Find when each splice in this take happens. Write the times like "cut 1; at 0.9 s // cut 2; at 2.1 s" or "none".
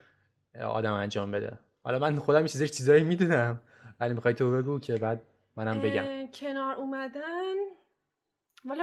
none